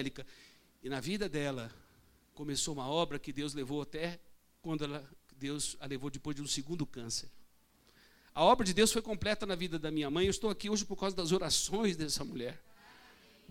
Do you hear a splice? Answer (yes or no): no